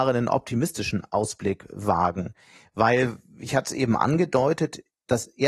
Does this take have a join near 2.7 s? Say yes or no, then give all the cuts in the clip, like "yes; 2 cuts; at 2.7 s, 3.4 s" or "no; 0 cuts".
no; 0 cuts